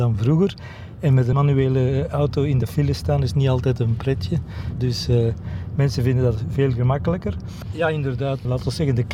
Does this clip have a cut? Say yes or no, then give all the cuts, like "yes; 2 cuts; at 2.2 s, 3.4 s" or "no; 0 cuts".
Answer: yes; 2 cuts; at 4.8 s, 7.7 s